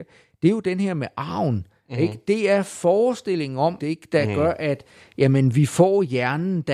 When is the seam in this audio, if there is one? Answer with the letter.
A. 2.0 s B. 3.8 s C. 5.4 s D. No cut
B